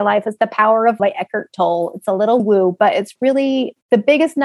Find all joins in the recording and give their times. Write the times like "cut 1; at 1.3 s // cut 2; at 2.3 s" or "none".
cut 1; at 1.0 s // cut 2; at 2.4 s